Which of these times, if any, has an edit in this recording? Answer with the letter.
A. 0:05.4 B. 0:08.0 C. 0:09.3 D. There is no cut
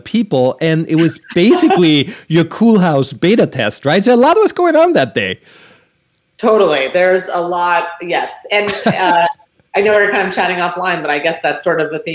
D